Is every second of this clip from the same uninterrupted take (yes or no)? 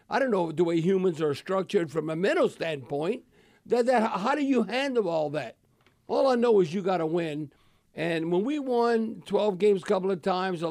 yes